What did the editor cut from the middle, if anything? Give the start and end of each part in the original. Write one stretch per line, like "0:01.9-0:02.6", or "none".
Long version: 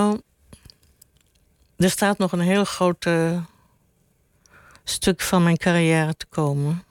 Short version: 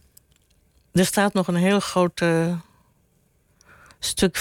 none